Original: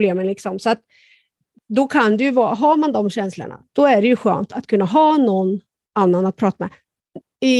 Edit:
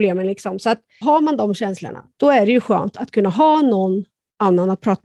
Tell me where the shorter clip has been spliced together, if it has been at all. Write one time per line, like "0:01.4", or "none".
0:01.0